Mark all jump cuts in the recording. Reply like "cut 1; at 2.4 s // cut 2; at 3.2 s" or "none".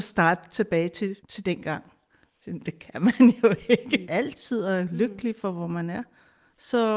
cut 1; at 1.2 s // cut 2; at 4.0 s